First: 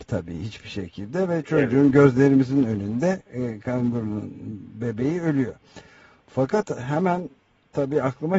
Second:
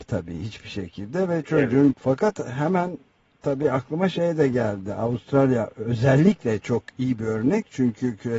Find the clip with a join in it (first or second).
second